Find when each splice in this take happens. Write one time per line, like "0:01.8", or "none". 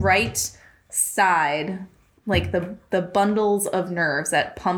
none